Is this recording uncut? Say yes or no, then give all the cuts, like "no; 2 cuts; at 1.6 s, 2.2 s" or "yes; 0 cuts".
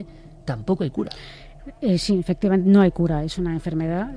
yes; 0 cuts